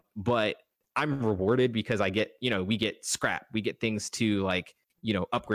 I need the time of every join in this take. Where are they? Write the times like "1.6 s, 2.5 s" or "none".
none